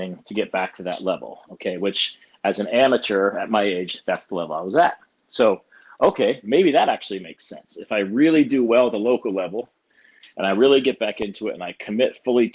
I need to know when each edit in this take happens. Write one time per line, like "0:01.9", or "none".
none